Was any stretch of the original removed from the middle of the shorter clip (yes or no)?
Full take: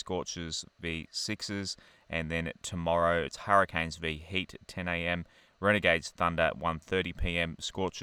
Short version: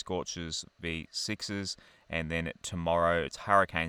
no